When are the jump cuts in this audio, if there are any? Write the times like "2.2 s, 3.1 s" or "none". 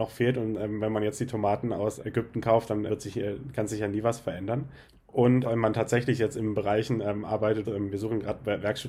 2.9 s, 7.6 s